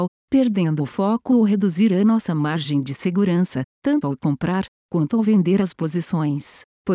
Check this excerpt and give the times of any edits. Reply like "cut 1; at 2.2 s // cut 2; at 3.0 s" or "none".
cut 1; at 3.7 s